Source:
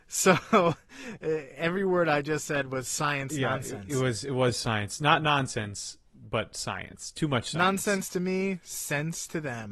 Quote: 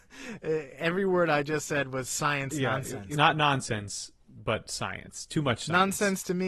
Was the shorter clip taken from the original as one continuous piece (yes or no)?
no